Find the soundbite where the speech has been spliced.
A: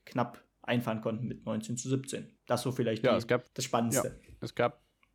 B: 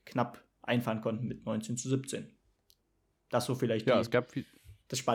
A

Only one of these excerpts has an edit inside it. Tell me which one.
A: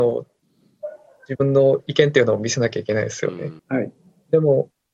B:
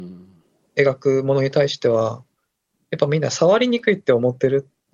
A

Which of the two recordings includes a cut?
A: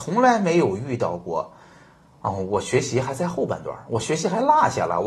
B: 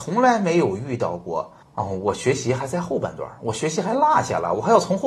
B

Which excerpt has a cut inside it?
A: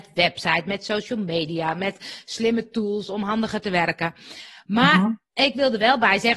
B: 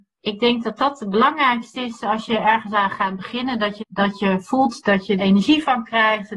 B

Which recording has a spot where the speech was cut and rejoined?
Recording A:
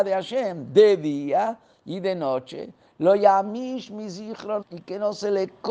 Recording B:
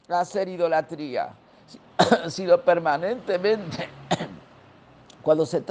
A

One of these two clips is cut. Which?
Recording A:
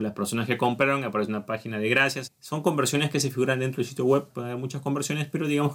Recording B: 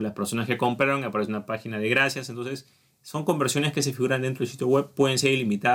A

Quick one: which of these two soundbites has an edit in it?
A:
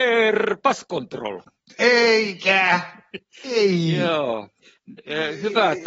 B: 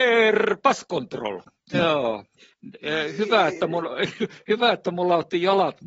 B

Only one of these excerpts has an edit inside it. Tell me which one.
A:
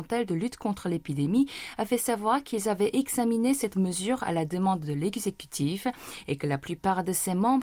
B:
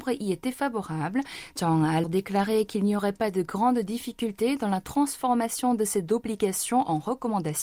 B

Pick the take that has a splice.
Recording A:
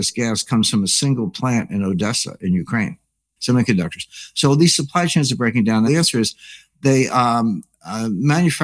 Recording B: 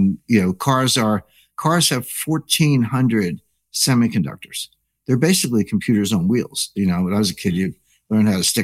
A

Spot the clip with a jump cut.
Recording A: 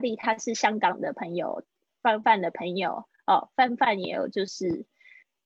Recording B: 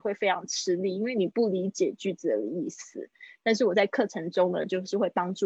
A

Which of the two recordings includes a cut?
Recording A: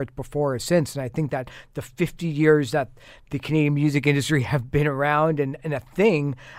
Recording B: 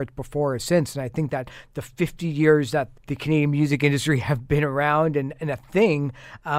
B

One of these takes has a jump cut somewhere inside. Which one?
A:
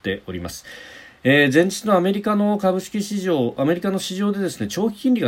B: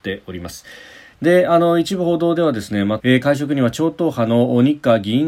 B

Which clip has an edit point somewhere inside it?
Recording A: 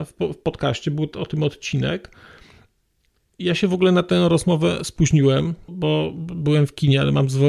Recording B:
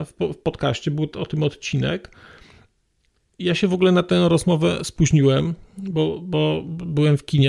A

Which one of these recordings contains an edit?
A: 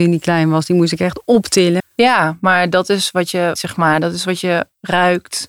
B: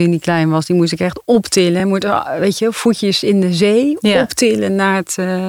A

